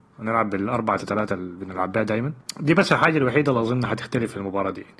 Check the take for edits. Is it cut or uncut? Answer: cut